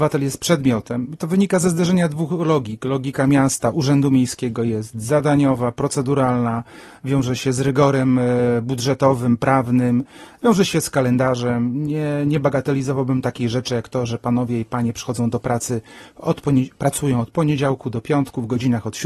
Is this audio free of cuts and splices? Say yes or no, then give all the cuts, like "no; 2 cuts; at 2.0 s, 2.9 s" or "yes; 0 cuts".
yes; 0 cuts